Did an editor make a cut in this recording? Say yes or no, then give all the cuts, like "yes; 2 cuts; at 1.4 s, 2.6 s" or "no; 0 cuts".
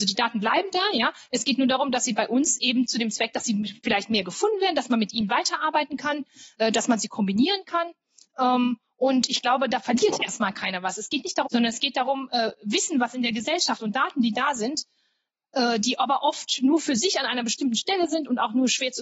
yes; 1 cut; at 11.5 s